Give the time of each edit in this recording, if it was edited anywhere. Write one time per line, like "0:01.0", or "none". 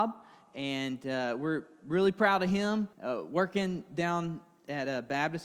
0:02.9